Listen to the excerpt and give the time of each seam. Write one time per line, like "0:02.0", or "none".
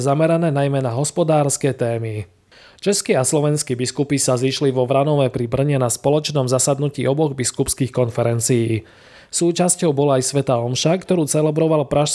none

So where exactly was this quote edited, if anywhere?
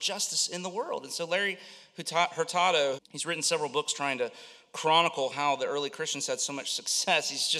0:03.0

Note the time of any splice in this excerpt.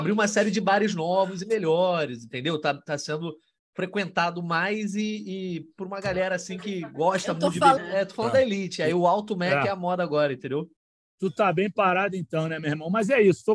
0:07.8

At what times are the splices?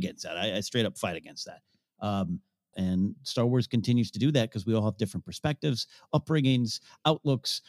0:02.7

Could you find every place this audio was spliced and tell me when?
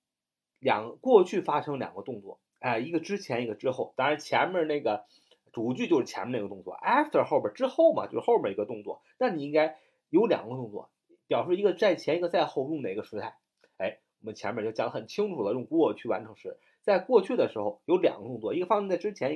none

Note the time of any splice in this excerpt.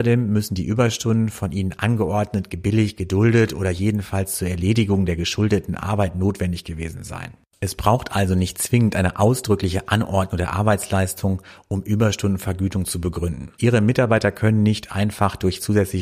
0:13.6

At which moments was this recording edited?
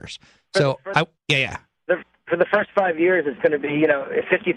0:01.2

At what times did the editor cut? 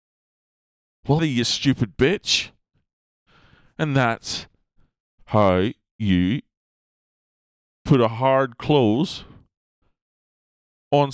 0:01.2

